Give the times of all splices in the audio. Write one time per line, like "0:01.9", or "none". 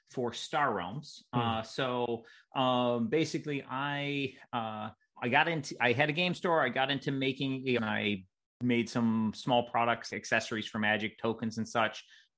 0:05.1
0:07.8
0:10.1